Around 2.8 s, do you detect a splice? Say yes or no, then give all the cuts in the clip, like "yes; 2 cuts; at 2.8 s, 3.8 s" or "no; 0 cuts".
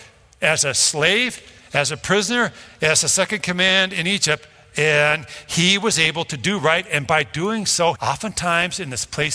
no; 1 cut; at 7.9 s